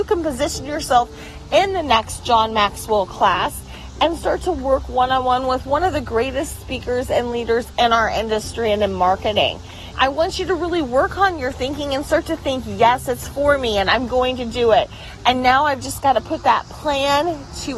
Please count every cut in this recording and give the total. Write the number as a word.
one